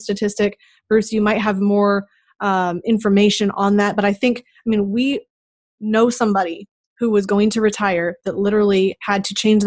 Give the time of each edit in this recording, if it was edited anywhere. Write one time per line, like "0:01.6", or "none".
none